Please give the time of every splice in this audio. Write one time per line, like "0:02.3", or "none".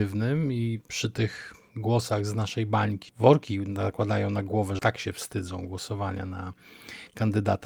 0:03.1
0:04.8